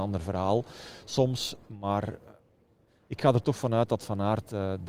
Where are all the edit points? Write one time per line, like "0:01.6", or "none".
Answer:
none